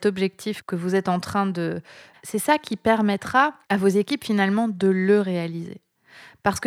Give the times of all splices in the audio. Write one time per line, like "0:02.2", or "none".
0:02.1
0:03.6